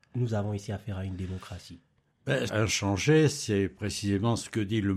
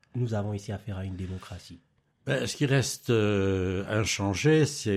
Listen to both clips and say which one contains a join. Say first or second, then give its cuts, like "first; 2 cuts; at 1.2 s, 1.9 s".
first; 1 cut; at 2.5 s